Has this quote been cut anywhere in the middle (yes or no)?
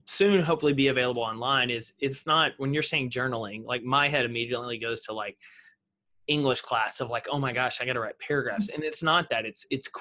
no